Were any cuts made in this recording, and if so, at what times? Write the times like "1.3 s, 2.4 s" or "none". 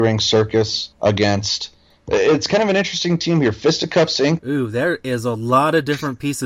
0.9 s, 4.4 s